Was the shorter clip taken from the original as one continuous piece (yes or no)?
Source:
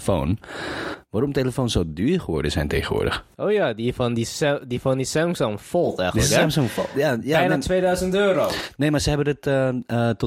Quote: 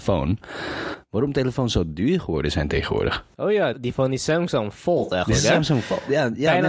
no